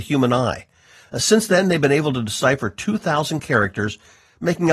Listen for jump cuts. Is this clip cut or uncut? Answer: cut